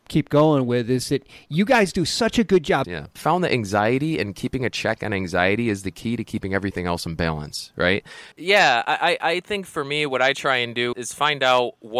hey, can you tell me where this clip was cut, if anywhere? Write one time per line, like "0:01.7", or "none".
0:02.8
0:08.3
0:10.9